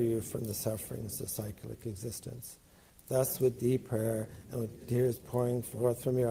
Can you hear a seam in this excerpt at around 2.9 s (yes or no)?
yes